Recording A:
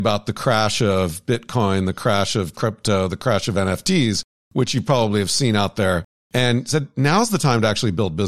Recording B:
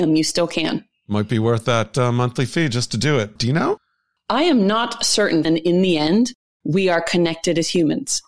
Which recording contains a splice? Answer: B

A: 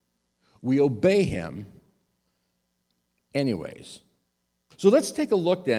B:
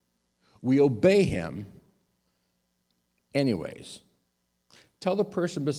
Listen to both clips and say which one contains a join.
A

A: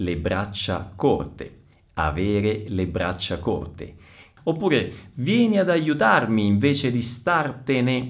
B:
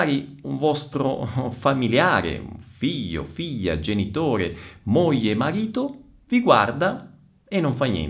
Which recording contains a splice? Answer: A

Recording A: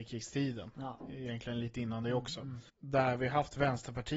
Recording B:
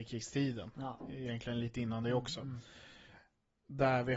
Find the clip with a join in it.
A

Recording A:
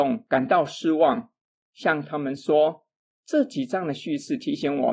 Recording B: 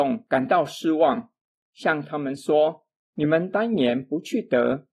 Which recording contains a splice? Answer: A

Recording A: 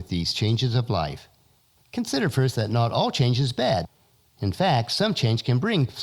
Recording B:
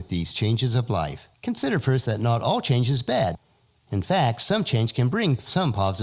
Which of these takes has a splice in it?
B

